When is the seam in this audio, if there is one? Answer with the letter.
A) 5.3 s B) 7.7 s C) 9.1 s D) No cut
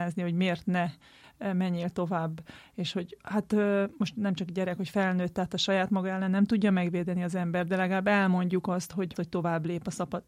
C